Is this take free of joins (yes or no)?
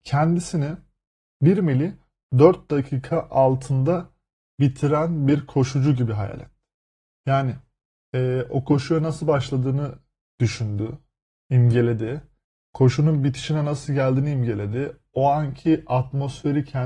yes